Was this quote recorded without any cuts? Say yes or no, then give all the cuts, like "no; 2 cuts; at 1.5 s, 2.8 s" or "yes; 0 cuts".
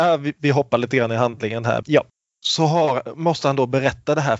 no; 1 cut; at 1.8 s